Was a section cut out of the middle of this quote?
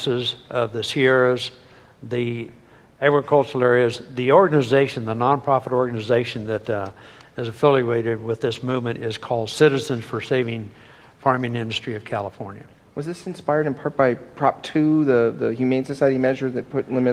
no; 0 cuts

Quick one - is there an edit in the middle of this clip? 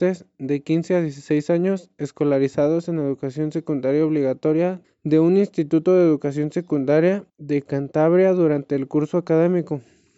yes; 2 cuts; at 4.8 s, 7.3 s

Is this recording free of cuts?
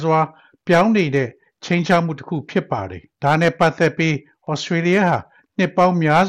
no; 1 cut; at 3.1 s

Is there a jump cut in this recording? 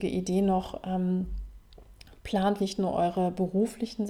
yes; 1 cut; at 2.6 s

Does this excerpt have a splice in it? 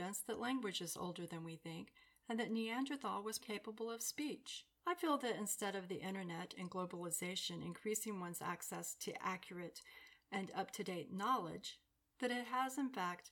yes; 2 cuts; at 3.4 s, 4.8 s

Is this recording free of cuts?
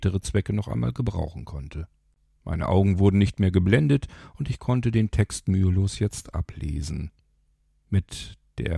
no; 1 cut; at 2.3 s

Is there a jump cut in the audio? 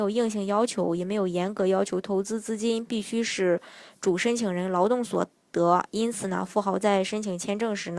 no; 0 cuts

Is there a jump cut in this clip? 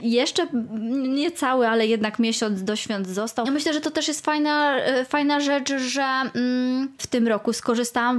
yes; 2 cuts; at 3.4 s, 7.0 s

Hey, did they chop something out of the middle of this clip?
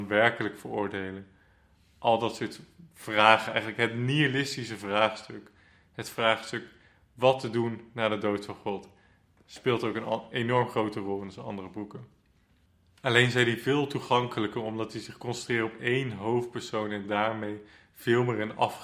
no; 0 cuts

